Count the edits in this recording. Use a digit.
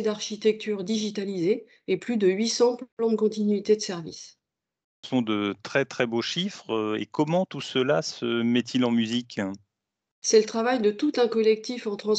0